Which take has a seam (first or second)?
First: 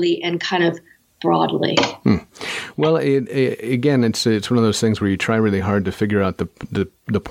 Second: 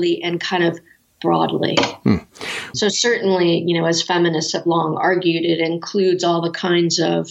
second